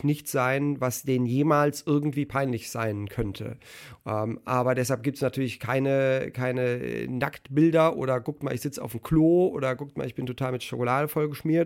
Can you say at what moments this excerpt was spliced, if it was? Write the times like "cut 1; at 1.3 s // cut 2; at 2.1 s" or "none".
cut 1; at 4.0 s